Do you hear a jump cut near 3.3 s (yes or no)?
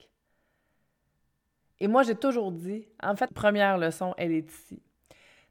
yes